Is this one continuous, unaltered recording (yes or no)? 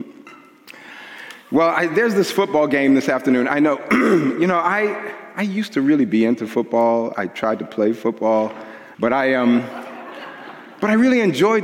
no